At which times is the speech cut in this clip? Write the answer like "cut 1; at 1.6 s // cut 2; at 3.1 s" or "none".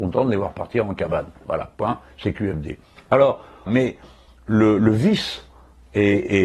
cut 1; at 3.7 s